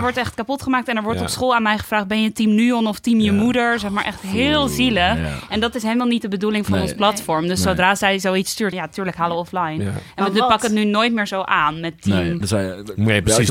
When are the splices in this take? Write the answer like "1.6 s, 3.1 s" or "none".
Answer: 8.7 s, 12.4 s